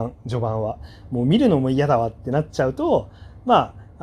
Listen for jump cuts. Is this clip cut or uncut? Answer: uncut